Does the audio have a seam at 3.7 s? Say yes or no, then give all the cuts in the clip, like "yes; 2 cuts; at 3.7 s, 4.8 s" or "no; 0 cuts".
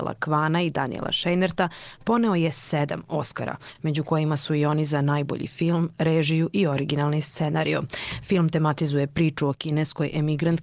no; 0 cuts